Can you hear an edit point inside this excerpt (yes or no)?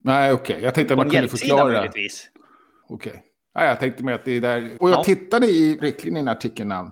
yes